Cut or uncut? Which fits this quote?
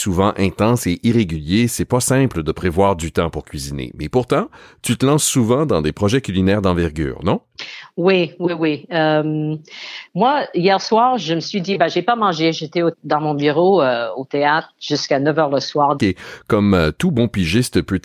cut